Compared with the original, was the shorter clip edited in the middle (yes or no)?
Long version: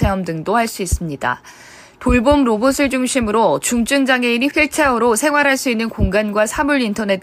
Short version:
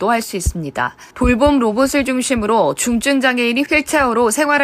yes